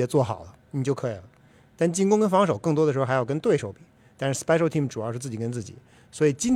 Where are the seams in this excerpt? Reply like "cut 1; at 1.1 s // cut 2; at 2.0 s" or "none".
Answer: none